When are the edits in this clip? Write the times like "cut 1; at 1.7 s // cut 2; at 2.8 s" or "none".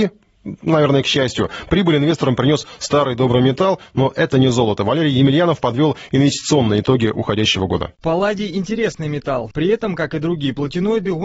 cut 1; at 8.0 s // cut 2; at 9.5 s

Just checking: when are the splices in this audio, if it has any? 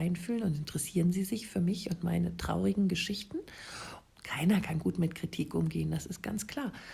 cut 1; at 4.1 s

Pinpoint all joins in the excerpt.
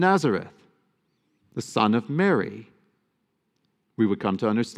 none

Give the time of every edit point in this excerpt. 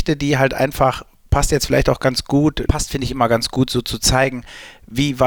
cut 1; at 2.7 s

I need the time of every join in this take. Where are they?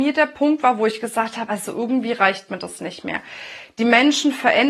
none

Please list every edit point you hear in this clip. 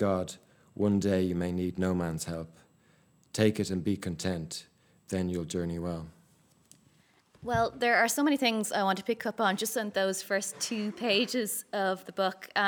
none

